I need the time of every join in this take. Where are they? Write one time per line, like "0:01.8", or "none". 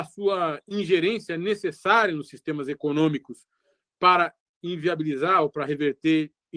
none